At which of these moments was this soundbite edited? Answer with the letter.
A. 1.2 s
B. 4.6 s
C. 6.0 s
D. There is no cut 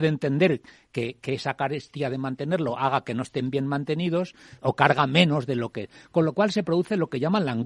B